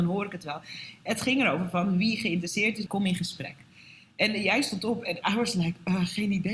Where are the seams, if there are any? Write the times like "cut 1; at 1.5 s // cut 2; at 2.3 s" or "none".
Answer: cut 1; at 2.9 s